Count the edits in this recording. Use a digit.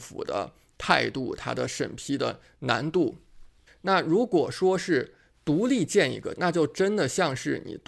2